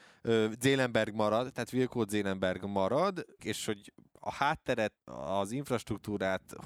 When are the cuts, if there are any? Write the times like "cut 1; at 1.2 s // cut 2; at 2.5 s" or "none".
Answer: cut 1; at 3.4 s // cut 2; at 5.0 s